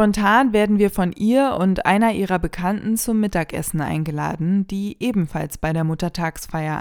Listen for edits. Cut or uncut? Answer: uncut